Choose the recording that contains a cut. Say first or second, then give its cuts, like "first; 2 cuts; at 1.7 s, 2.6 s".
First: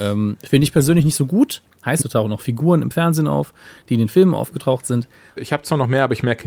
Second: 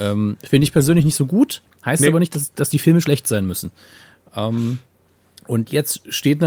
first; 2 cuts; at 2.0 s, 5.4 s